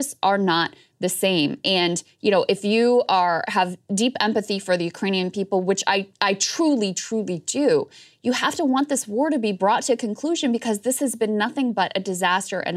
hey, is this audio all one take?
yes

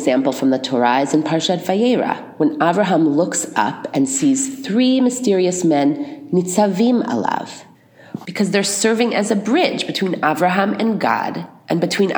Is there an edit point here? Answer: yes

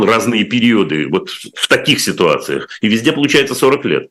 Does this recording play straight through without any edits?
yes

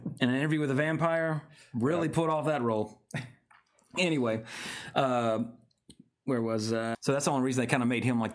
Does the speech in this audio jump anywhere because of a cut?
yes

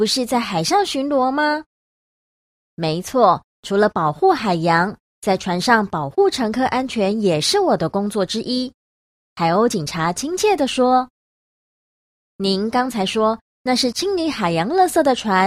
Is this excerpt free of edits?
yes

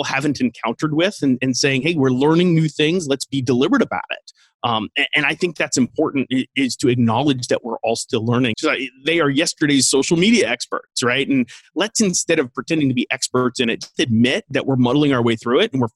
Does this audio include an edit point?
yes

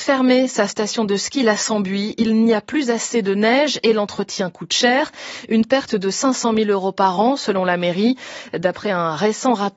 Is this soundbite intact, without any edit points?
yes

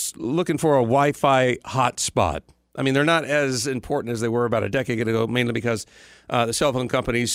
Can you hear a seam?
no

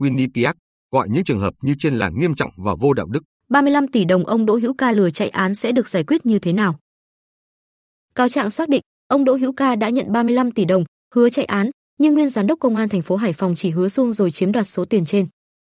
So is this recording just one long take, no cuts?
no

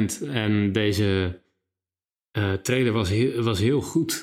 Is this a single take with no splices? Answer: yes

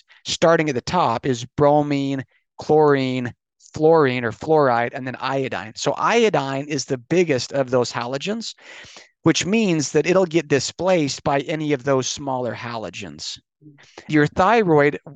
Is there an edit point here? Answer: yes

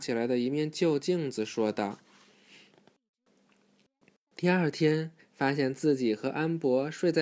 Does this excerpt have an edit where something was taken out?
yes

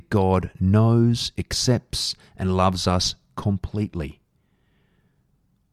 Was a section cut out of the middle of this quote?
no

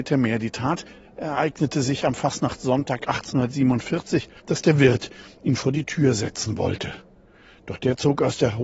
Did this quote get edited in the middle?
yes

